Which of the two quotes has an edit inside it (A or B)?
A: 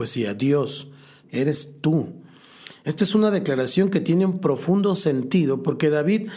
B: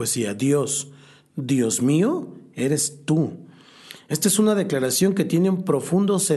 A